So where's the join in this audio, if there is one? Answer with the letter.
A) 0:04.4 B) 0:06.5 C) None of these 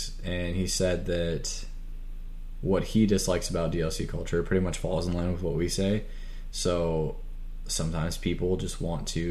B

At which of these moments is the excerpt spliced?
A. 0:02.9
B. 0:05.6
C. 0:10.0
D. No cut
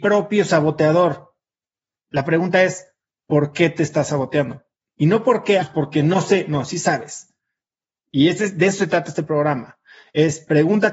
B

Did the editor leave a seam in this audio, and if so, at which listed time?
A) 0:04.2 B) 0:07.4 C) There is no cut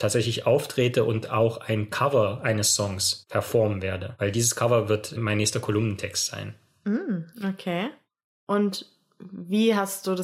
C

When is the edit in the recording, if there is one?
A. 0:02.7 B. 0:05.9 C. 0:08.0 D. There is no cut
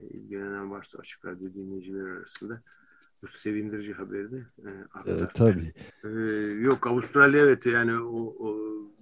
B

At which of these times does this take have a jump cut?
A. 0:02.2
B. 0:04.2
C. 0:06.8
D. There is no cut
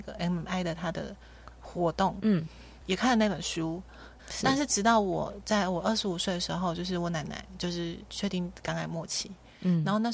B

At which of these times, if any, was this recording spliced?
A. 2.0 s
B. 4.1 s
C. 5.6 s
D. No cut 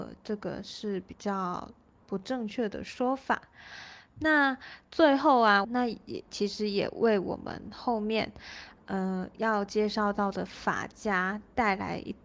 C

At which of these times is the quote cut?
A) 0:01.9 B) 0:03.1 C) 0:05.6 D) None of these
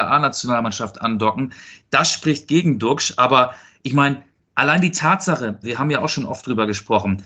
C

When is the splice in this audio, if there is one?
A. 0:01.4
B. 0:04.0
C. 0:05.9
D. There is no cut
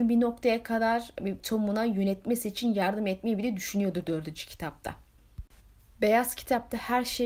A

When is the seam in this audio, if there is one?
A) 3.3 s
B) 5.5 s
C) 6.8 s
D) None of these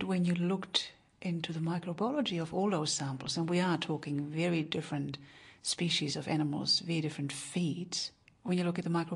D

